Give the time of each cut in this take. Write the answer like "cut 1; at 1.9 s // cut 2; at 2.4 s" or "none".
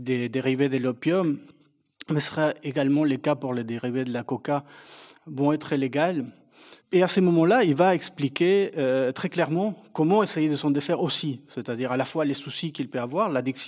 cut 1; at 6.8 s

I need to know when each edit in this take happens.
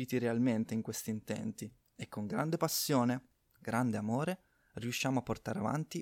cut 1; at 3.5 s

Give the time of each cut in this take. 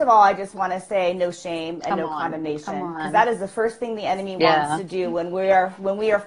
none

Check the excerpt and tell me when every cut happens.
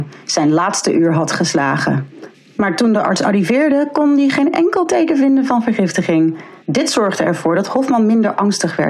cut 1; at 6.6 s

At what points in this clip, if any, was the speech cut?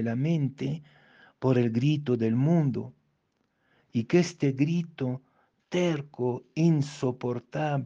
none

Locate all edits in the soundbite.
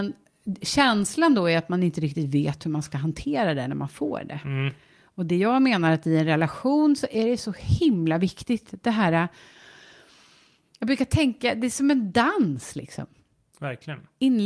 none

